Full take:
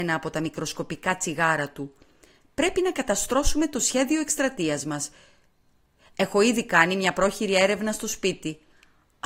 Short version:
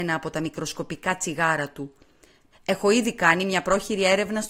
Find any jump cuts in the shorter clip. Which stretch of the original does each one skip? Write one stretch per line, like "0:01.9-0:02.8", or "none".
0:02.5-0:06.0